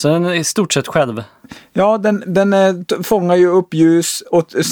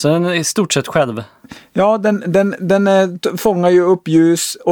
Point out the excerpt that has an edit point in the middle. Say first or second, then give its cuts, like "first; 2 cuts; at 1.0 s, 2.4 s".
first; 1 cut; at 2.2 s